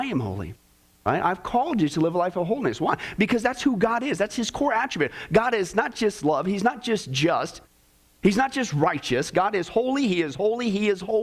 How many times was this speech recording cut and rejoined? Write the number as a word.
zero